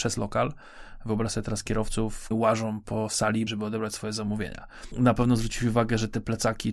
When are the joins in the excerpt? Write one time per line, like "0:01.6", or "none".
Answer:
0:02.3
0:03.5
0:04.9